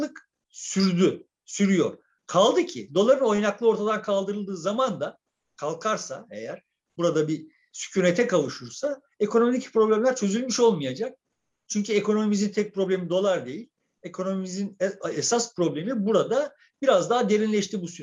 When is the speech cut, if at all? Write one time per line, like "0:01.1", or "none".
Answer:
none